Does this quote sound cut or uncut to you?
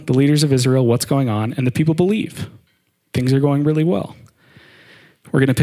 uncut